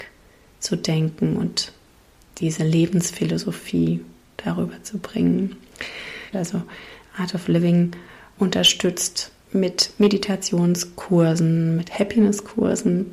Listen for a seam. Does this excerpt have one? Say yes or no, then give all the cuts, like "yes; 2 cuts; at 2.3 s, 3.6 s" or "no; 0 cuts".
yes; 2 cuts; at 6.3 s, 11.8 s